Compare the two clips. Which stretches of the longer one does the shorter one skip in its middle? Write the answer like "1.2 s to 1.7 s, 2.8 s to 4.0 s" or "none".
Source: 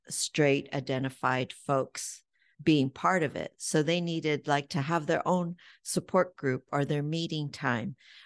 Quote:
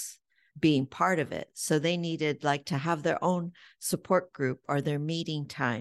none